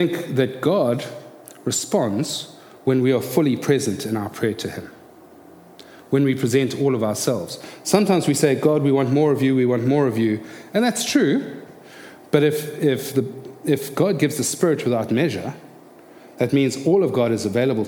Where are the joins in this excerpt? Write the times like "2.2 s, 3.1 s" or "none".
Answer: none